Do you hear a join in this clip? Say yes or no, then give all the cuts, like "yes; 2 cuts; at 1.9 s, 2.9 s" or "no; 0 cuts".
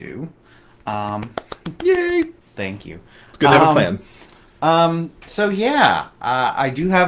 no; 0 cuts